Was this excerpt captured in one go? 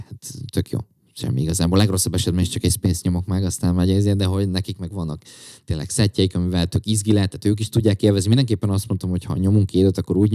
yes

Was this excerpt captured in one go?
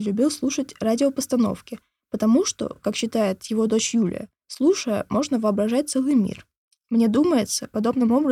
yes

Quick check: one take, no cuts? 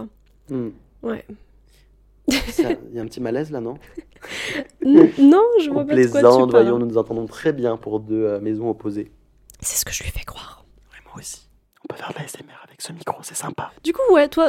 yes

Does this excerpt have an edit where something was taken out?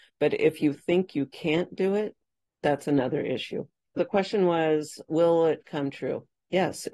no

